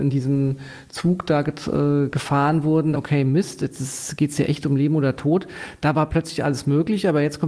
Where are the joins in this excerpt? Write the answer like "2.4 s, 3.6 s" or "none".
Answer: 2.9 s